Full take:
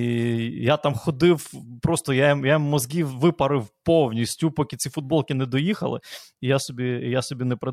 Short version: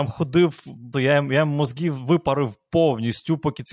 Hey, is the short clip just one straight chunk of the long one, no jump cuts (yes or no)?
no